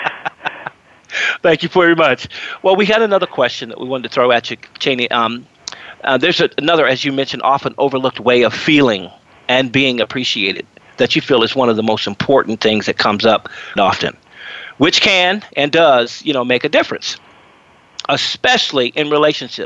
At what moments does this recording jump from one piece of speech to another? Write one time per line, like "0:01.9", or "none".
0:13.8